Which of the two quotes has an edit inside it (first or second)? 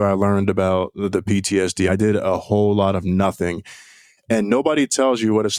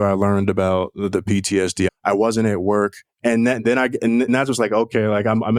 second